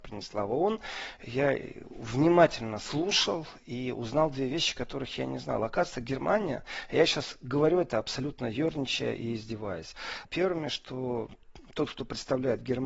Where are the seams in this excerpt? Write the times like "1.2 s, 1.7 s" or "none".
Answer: 10.2 s